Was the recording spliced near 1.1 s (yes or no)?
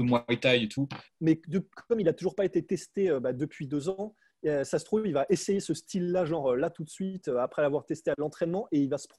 yes